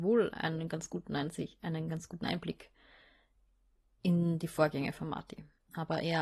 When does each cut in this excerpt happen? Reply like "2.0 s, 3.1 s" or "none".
none